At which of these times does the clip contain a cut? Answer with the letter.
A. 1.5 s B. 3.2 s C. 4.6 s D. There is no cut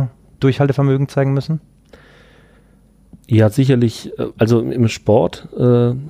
B